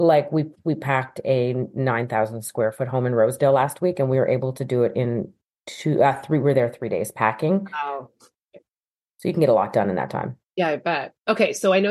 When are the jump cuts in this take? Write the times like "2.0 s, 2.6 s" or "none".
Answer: 8.4 s